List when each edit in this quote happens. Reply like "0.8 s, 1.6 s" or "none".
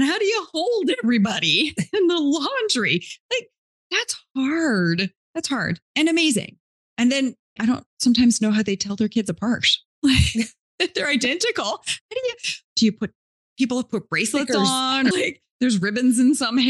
7.6 s, 13.4 s, 15.1 s